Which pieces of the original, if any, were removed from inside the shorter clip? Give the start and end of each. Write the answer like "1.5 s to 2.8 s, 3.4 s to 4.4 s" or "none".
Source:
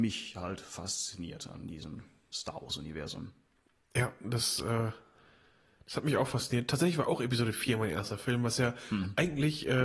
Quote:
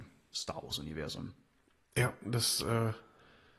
none